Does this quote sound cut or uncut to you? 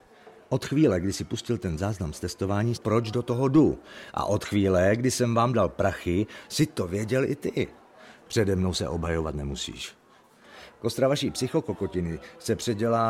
cut